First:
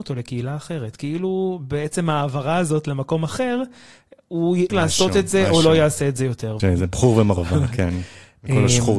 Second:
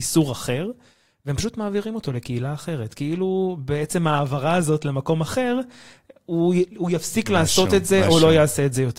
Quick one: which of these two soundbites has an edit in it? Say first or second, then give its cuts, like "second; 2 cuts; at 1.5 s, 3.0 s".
first; 2 cuts; at 4.7 s, 6.6 s